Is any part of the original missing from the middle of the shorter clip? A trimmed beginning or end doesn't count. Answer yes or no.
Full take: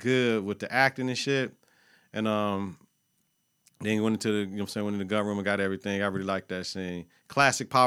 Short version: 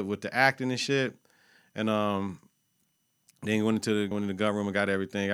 yes